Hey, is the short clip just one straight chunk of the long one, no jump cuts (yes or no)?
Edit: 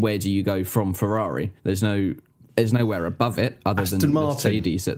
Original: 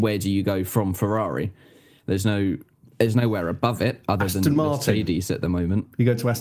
no